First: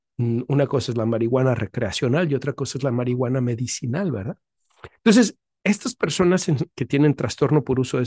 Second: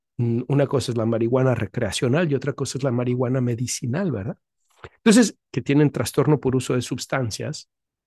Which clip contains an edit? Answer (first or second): second